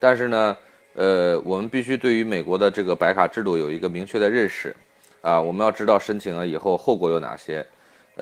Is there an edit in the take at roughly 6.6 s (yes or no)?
no